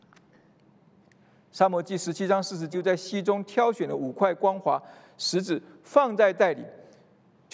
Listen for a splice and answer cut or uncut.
cut